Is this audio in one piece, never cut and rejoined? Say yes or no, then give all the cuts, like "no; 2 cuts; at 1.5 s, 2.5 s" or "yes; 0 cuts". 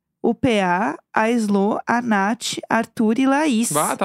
yes; 0 cuts